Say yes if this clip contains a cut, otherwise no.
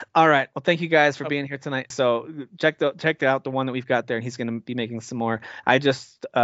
yes